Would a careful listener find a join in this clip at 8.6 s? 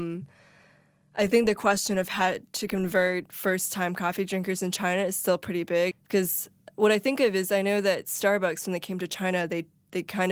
no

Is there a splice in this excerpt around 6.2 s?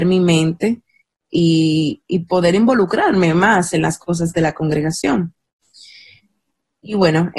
no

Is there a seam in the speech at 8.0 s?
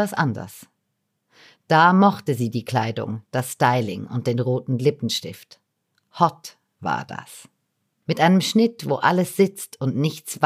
yes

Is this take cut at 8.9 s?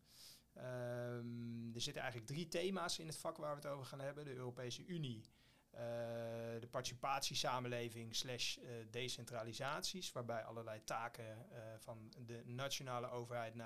no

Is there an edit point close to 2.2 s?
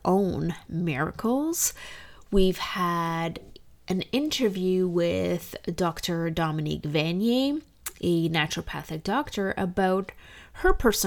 no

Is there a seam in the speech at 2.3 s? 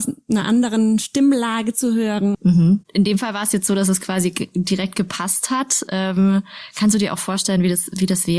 yes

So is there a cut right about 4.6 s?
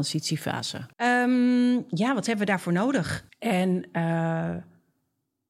no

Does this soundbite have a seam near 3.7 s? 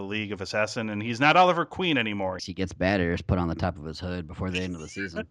no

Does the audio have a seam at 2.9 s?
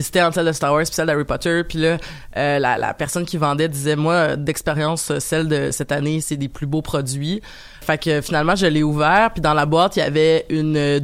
no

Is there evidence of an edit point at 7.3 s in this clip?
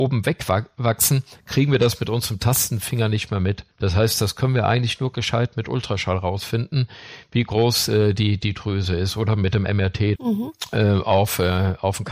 no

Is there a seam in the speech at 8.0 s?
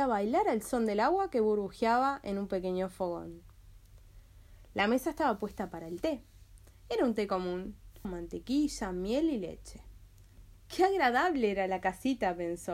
yes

